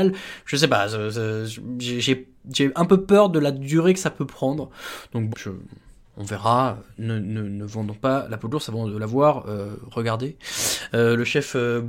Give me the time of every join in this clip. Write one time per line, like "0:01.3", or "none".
0:05.3
0:10.9